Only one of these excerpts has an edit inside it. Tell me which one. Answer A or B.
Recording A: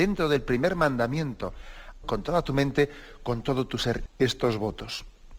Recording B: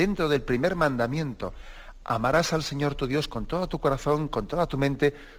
A